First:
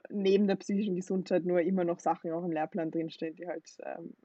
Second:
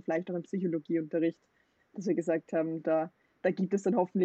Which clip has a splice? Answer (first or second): second